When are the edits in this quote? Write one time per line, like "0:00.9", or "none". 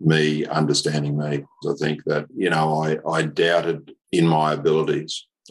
0:01.6
0:04.0